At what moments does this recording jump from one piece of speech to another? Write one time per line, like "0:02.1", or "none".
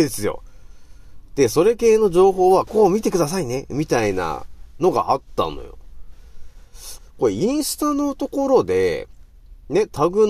0:02.7
0:07.0